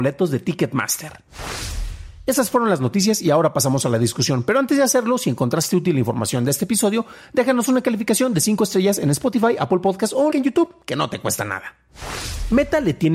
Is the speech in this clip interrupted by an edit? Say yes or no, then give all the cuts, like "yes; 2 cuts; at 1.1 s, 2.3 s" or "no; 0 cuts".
yes; 1 cut; at 10.3 s